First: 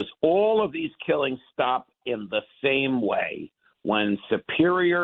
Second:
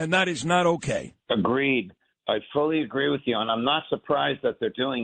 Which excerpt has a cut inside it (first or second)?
second